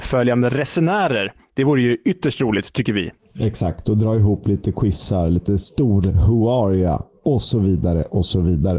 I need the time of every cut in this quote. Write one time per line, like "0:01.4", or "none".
none